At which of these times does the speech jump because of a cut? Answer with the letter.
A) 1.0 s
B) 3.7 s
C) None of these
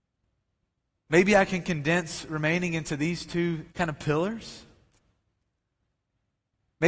B